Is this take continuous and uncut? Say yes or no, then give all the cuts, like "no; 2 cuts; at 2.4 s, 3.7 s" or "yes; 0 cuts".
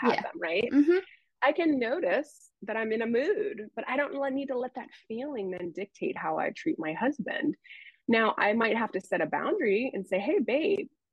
yes; 0 cuts